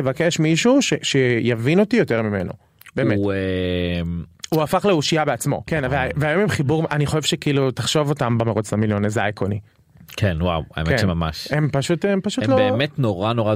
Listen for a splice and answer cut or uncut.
cut